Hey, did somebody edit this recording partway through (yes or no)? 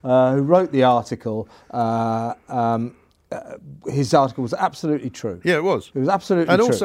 no